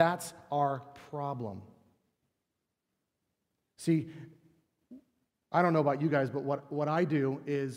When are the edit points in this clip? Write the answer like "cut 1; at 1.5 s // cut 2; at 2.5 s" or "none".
none